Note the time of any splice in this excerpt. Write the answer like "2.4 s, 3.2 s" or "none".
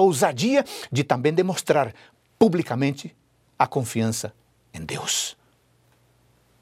none

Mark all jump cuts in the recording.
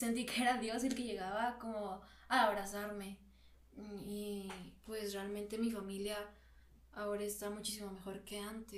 none

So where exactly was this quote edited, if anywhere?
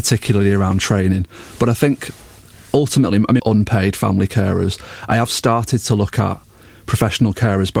3.4 s

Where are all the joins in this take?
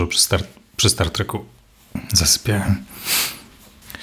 none

